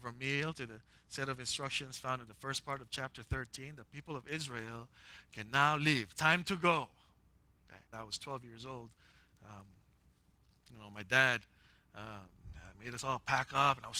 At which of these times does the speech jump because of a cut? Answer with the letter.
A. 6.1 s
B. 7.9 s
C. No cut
B